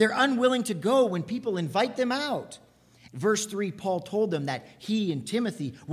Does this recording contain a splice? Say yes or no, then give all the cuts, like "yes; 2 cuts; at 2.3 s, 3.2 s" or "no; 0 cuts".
yes; 1 cut; at 3.1 s